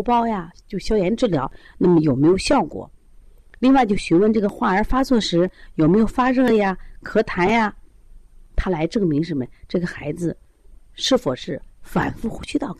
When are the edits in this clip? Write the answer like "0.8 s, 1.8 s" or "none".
none

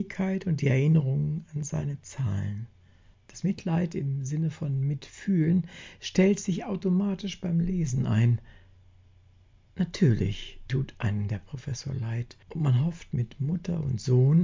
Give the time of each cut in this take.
3.1 s, 12.4 s

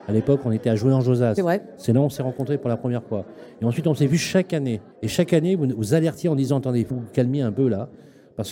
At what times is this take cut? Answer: 4.9 s, 6.9 s

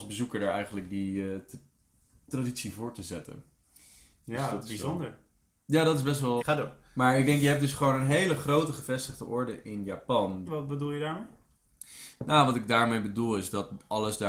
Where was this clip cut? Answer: 6.4 s, 10.5 s

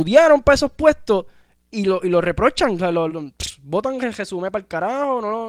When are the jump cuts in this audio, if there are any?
3.1 s

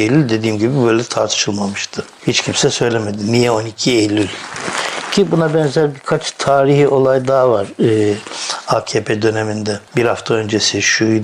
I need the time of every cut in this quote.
none

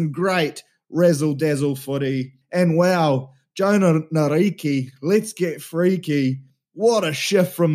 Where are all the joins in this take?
2.4 s

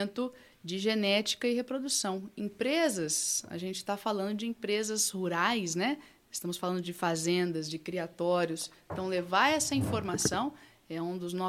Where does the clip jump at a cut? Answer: none

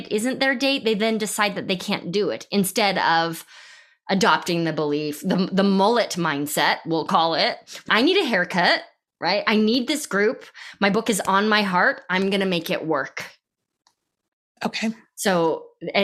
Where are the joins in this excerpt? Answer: 7.9 s

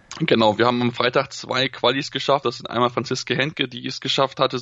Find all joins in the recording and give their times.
none

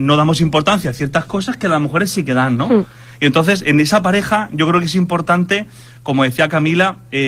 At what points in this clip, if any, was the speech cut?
none

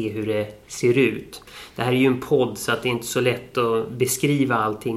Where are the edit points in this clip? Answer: none

